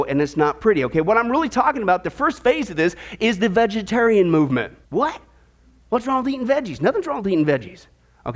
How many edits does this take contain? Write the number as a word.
one